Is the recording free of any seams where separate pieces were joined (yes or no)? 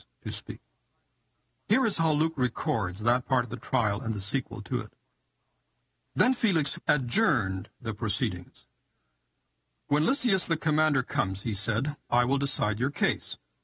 no